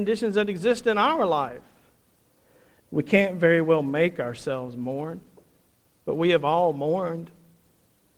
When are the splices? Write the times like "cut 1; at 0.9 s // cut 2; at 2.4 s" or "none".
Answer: cut 1; at 2.8 s